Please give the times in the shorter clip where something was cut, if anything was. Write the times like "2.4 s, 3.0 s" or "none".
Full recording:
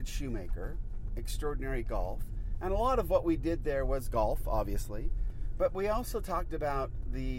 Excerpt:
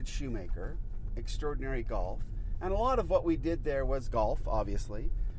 none